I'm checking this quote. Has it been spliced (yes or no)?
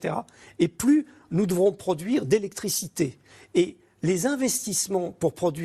no